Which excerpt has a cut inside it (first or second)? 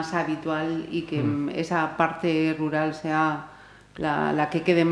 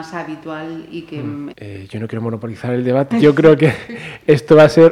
second